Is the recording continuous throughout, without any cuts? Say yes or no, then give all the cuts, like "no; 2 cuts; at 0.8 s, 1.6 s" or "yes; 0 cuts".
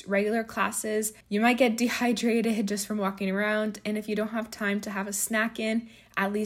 no; 1 cut; at 1.2 s